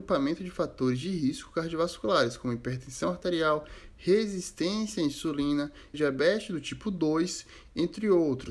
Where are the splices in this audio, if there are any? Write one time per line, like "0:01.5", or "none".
0:05.9